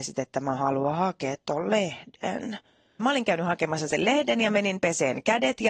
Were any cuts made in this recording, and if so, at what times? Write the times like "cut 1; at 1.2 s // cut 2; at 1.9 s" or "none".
cut 1; at 3.0 s